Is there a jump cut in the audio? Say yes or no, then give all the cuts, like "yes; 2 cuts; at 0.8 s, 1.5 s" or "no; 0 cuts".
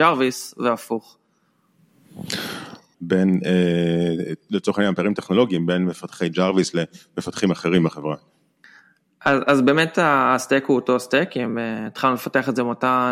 yes; 1 cut; at 2.9 s